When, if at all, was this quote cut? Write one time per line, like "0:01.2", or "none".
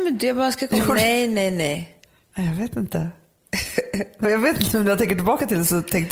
0:04.2